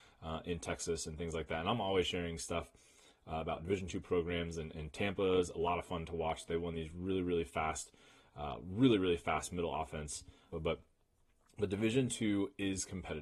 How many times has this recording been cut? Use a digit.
1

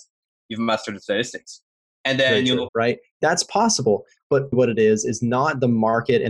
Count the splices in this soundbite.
2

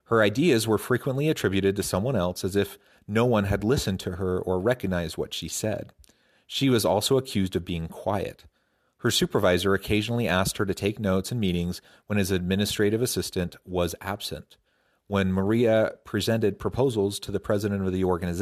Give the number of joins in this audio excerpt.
0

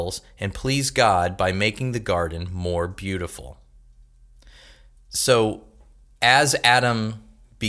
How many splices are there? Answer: 1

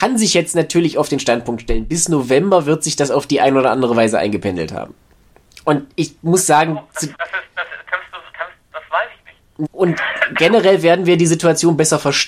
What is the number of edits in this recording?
3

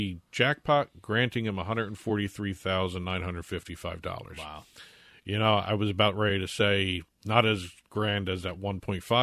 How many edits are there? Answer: 0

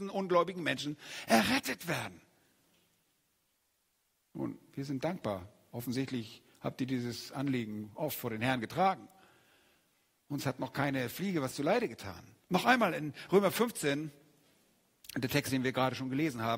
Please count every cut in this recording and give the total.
1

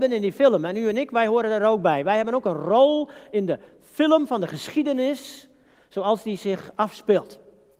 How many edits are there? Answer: 0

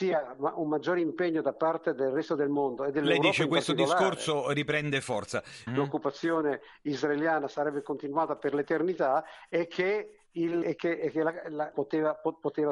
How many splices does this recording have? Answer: 3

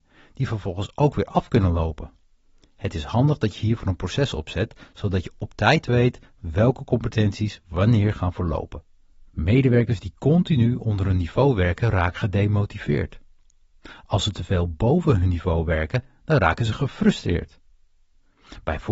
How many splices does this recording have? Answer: 1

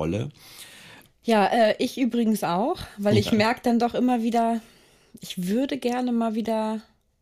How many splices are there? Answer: 1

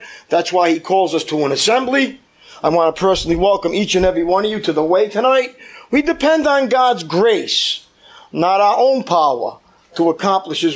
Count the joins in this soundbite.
0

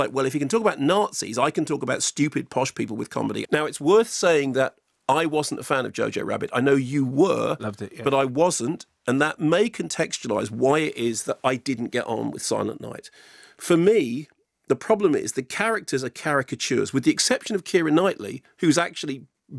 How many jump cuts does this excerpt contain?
1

